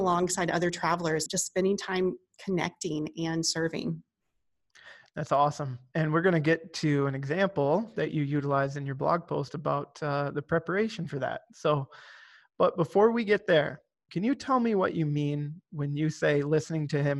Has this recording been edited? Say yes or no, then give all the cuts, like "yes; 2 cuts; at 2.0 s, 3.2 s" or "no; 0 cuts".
yes; 3 cuts; at 1.3 s, 14.1 s, 15.7 s